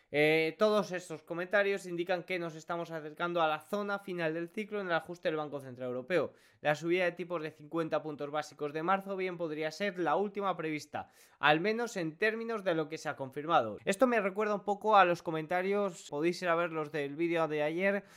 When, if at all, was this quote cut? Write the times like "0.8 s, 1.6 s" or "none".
13.8 s, 16.1 s